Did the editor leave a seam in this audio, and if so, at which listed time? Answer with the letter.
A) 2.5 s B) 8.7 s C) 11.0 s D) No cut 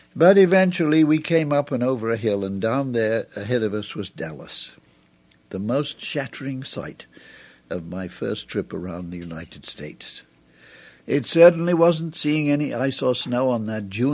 C